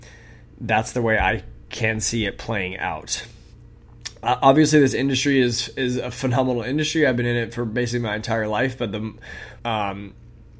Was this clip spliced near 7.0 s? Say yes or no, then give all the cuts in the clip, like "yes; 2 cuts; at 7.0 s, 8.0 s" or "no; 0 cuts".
no; 1 cut; at 9.6 s